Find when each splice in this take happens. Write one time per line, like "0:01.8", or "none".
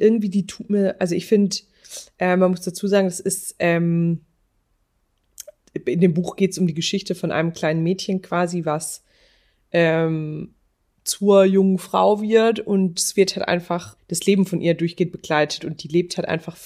0:14.0